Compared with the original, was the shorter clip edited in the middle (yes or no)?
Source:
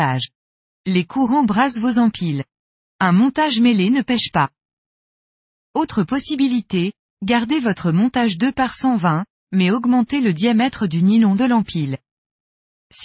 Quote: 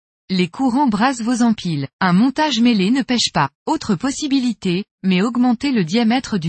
yes